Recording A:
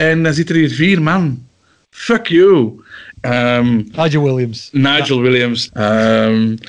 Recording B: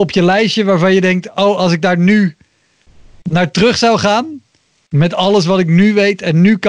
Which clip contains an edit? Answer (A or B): A